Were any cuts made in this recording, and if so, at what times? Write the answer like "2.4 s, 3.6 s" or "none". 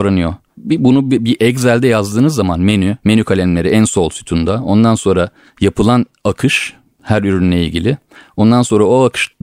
3.0 s